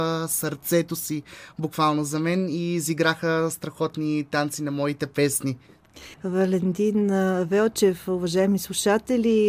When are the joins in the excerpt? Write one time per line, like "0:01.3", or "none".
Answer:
0:06.1